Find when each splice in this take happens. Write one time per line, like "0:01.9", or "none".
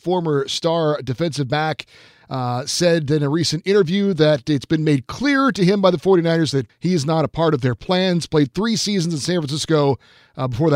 0:06.7